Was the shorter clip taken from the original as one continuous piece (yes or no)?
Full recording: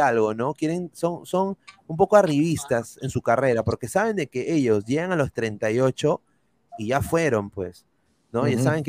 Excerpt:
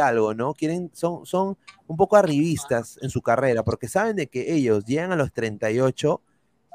yes